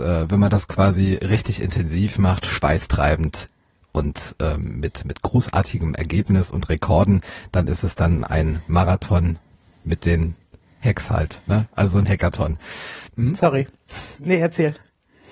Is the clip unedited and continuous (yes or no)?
no